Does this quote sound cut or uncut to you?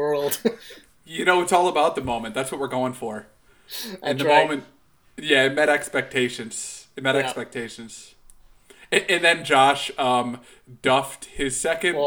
uncut